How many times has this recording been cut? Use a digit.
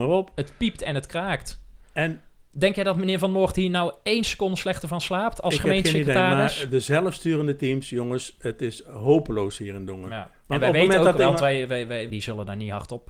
1